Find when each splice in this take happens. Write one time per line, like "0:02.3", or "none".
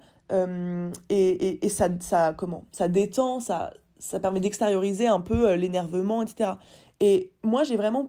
0:06.9